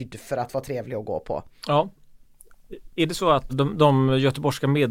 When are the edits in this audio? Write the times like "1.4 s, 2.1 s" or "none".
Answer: 3.5 s